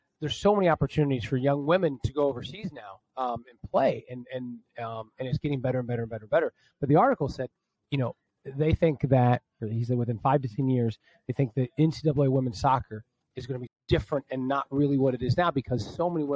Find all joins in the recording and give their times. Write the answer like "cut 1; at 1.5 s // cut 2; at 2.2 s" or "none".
cut 1; at 9.6 s // cut 2; at 13.7 s